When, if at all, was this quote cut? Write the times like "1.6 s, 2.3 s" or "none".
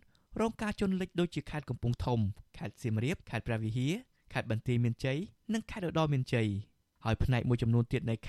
3.2 s